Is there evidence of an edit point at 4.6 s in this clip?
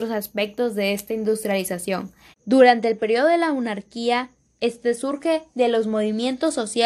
yes; 2 cuts; at 2.3 s, 4.6 s

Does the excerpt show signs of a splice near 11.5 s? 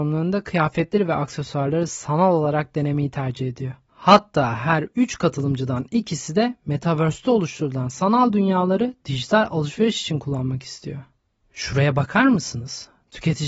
no; 0 cuts

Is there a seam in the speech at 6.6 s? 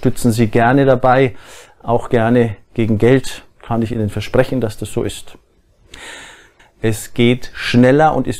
yes; 1 cut; at 6.6 s

